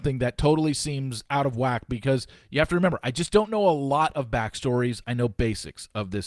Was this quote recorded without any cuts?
yes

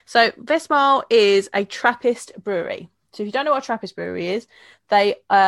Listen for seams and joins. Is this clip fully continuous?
yes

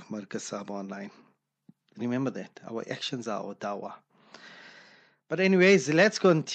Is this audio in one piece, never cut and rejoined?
yes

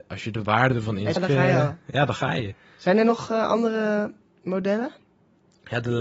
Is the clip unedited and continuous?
no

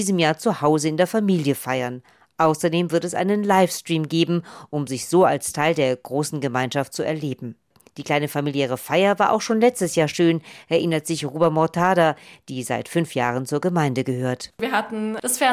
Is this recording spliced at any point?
no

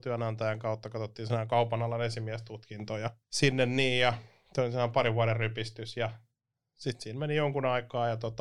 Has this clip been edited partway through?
yes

